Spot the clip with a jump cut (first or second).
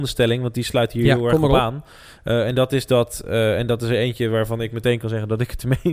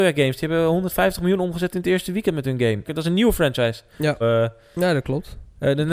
second